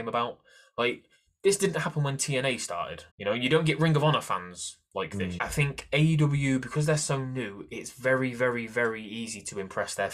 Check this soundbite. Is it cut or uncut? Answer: cut